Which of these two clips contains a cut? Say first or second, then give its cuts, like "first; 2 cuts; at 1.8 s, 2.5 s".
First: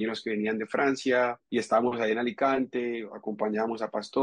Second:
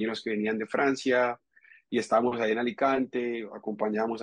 first; 1 cut; at 1.4 s